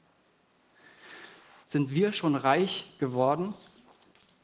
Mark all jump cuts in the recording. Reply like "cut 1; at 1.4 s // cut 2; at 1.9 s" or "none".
cut 1; at 1.6 s